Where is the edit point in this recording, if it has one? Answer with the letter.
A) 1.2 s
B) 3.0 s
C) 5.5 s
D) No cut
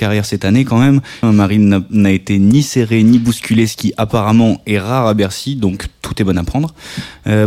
A